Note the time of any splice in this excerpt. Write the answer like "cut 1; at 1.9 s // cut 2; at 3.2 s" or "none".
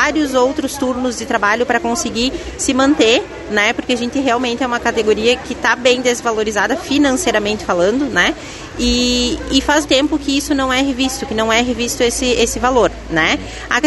cut 1; at 9.8 s